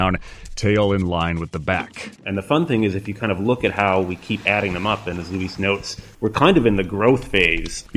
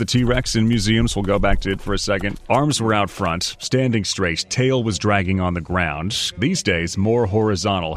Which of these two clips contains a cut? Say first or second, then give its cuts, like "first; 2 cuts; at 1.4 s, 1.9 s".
first; 2 cuts; at 2.2 s, 6.1 s